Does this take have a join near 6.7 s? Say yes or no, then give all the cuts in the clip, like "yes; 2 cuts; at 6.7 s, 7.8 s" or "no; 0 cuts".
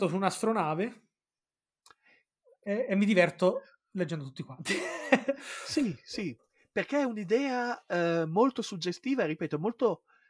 no; 1 cut; at 2.6 s